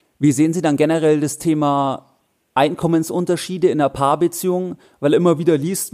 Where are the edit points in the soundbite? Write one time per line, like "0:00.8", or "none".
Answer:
none